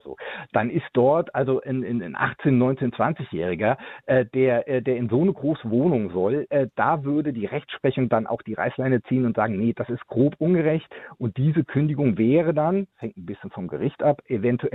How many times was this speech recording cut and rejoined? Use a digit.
0